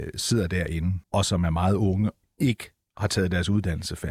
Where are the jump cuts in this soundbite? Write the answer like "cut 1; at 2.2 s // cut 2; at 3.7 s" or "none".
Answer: cut 1; at 1.0 s // cut 2; at 2.2 s